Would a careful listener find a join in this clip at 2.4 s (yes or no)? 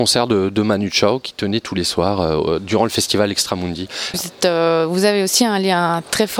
no